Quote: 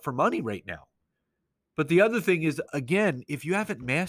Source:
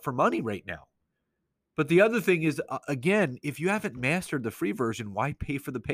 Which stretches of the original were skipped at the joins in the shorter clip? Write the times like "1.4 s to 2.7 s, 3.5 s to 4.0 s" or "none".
2.7 s to 2.8 s